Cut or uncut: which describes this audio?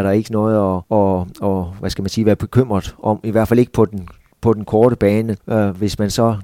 cut